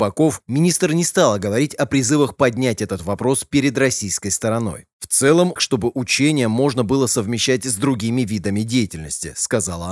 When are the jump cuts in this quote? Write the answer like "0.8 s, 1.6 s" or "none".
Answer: 5.6 s